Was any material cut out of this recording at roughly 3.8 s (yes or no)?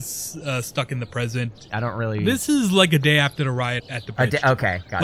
yes